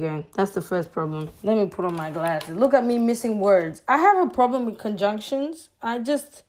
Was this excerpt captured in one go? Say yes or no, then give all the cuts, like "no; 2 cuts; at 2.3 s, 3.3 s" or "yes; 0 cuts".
yes; 0 cuts